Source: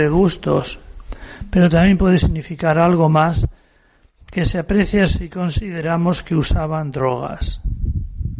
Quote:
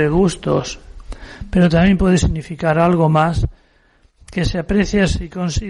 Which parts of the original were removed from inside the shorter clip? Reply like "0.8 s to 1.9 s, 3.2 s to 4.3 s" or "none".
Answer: none